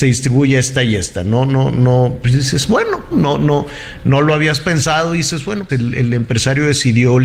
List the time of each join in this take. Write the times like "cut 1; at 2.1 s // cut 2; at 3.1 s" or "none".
cut 1; at 3.1 s // cut 2; at 5.7 s